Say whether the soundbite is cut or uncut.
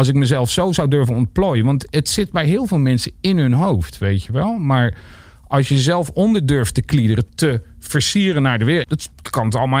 cut